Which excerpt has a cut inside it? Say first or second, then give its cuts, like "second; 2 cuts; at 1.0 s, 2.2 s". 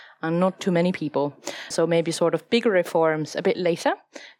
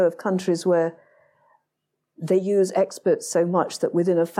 first; 1 cut; at 1.7 s